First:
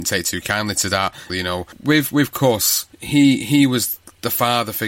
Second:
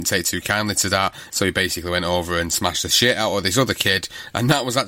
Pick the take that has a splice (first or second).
first